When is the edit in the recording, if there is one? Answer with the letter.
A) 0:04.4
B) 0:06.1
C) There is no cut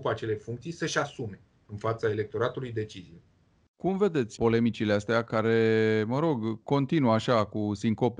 A